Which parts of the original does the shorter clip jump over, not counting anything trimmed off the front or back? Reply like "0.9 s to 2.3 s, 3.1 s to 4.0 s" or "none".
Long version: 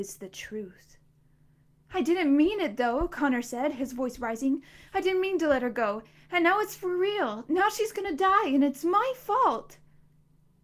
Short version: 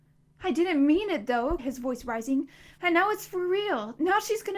3.1 s to 3.7 s, 4.9 s to 6.3 s